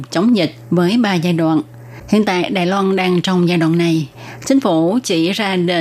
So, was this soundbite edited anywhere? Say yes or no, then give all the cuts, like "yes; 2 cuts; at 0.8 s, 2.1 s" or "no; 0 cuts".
yes; 1 cut; at 2.0 s